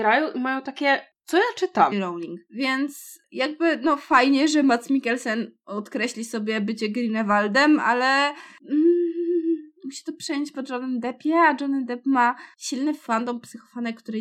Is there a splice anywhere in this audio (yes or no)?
yes